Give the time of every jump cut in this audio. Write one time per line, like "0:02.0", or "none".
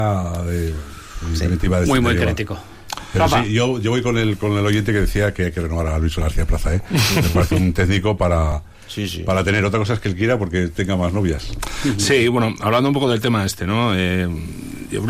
none